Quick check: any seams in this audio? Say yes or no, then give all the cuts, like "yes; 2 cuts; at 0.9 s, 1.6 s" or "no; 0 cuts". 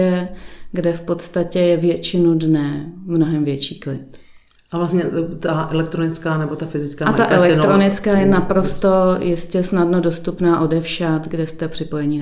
no; 0 cuts